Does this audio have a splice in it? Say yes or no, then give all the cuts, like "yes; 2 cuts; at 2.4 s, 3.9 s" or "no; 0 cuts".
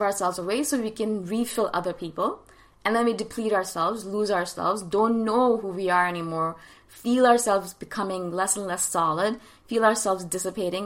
no; 0 cuts